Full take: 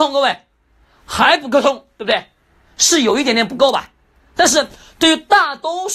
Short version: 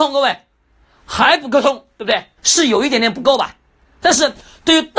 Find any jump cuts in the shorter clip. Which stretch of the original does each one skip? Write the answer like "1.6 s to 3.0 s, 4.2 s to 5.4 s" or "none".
2.4 s to 2.7 s